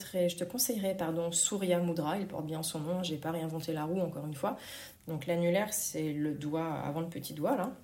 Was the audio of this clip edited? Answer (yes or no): yes